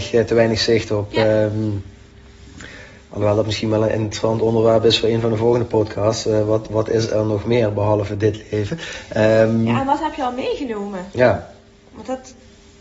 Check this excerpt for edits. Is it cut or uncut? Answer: uncut